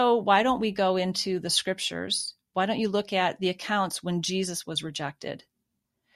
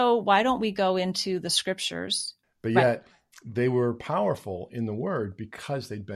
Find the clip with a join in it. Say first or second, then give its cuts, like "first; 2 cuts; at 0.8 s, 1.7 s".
second; 1 cut; at 2.4 s